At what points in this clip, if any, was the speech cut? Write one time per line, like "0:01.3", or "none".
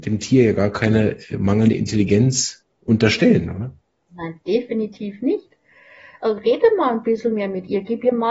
none